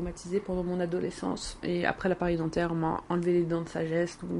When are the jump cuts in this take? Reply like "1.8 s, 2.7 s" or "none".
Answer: 1.6 s